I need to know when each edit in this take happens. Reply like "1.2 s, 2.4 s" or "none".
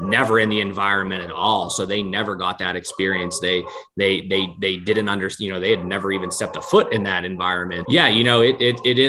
7.9 s